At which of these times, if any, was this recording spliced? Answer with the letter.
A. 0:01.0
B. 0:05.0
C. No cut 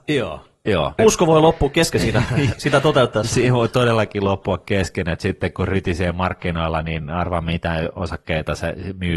A